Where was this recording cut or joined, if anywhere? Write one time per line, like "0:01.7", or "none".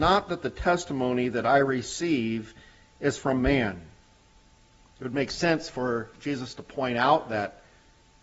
none